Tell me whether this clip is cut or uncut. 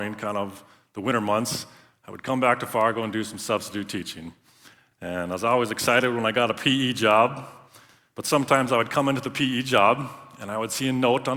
uncut